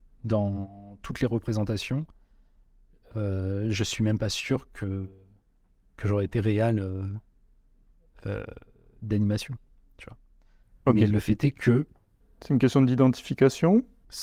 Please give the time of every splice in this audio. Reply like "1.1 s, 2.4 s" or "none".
none